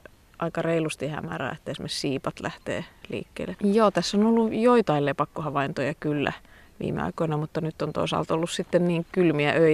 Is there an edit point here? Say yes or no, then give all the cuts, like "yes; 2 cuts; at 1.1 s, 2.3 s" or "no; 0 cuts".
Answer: yes; 1 cut; at 3.5 s